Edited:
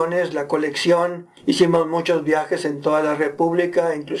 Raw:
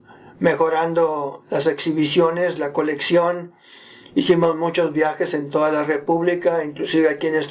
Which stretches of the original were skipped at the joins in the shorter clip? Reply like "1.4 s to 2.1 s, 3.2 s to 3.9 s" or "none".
3.6 s to 4.1 s